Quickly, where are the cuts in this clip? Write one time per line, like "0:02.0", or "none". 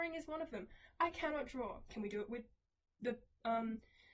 0:01.9